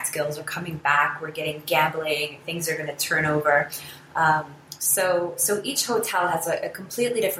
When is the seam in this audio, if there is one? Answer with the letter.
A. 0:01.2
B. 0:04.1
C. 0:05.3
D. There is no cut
D